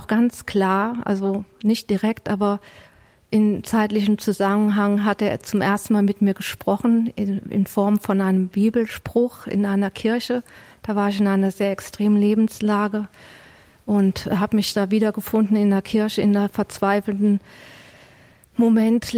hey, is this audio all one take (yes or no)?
yes